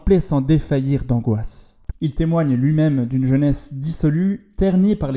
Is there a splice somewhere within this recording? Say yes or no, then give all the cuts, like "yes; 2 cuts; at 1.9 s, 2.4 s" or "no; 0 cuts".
yes; 1 cut; at 1.9 s